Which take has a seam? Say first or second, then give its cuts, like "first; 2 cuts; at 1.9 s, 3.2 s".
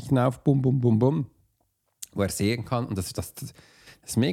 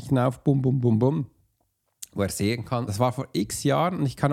second; 1 cut; at 2.9 s